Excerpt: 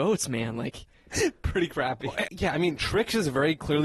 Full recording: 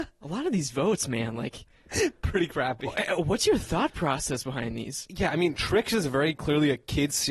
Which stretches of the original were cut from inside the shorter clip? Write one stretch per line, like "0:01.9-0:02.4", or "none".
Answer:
0:03.1-0:05.1